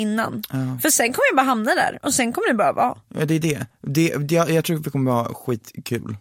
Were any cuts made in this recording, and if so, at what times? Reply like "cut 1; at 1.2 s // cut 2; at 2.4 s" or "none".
none